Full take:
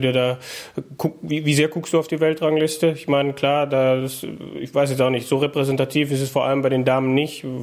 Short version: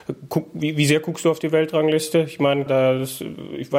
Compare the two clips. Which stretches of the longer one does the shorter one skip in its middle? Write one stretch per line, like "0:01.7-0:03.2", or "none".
0:03.3-0:03.7